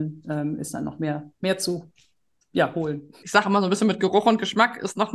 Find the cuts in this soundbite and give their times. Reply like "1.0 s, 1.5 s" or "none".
3.2 s